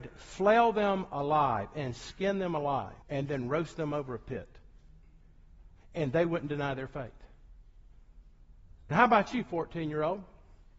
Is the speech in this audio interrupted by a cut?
yes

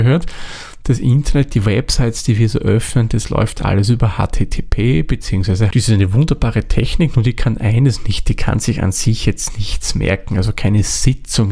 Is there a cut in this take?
yes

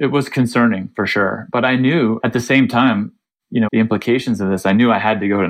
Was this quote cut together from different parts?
yes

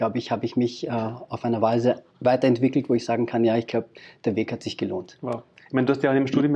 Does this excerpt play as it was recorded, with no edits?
yes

